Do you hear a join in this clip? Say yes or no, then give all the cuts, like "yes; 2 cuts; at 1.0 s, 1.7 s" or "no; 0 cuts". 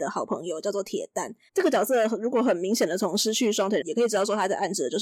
yes; 2 cuts; at 1.5 s, 3.8 s